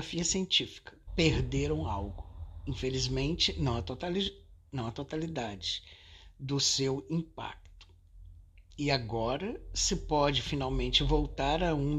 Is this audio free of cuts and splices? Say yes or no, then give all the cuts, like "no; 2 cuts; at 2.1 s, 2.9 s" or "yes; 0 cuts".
no; 1 cut; at 1.1 s